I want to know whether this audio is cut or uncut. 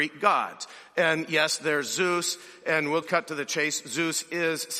cut